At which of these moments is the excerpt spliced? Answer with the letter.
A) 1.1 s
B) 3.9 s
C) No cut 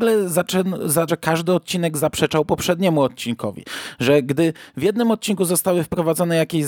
A